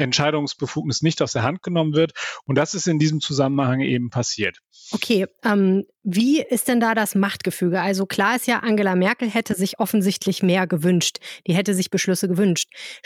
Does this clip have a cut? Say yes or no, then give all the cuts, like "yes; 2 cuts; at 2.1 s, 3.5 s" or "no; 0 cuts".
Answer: no; 0 cuts